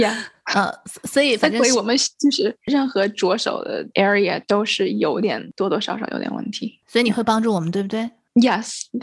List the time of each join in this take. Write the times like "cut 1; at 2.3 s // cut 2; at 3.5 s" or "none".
none